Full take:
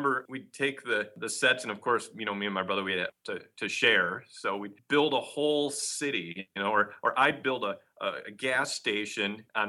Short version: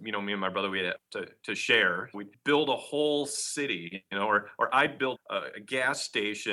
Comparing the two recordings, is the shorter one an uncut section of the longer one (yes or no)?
no